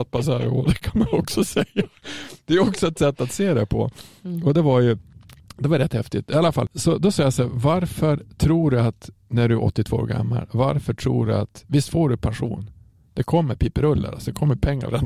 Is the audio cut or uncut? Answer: uncut